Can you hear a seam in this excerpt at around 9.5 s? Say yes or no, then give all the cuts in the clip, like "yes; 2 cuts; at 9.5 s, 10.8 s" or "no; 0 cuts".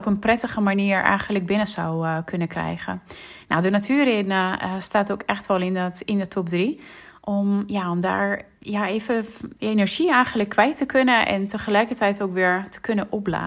yes; 1 cut; at 9.5 s